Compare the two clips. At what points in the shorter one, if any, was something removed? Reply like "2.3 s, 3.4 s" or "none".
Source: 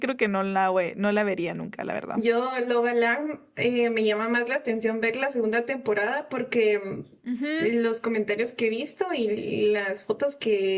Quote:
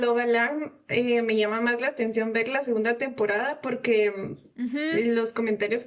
none